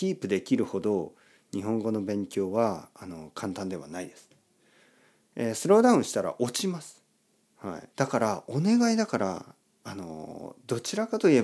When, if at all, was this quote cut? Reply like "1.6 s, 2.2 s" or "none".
7.9 s